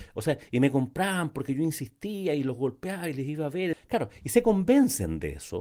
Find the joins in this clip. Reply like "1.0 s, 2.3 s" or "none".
3.7 s